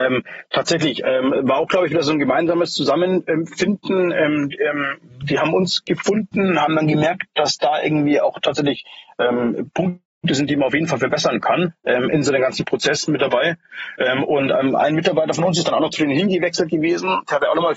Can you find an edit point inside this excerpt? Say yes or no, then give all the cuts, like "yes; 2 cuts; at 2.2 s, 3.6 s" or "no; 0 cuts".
no; 0 cuts